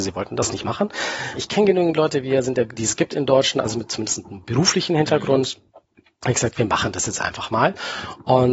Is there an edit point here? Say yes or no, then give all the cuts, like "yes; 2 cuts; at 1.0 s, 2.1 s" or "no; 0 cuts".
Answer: yes; 2 cuts; at 1.3 s, 2.8 s